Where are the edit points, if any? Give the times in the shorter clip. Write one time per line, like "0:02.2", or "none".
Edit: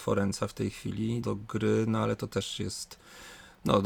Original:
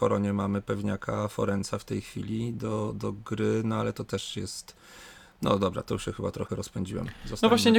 0:01.2